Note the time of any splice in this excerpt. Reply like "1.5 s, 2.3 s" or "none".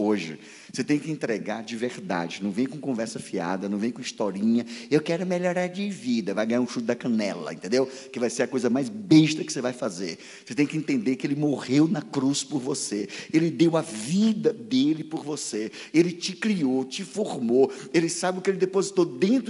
none